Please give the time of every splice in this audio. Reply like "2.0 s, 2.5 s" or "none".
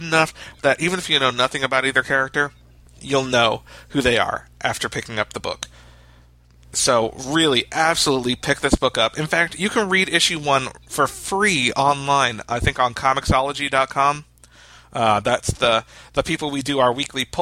none